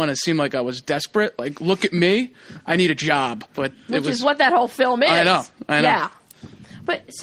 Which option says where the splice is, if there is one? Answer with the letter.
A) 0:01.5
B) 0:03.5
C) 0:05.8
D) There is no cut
B